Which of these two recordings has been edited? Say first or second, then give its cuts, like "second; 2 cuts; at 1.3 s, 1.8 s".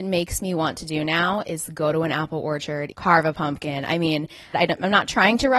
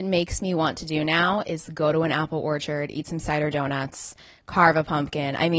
first; 2 cuts; at 2.9 s, 4.5 s